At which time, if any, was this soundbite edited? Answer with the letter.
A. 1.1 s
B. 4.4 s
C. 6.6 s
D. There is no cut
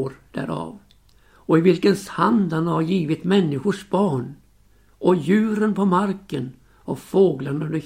A